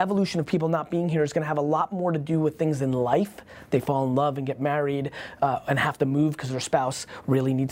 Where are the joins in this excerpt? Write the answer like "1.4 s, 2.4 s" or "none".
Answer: none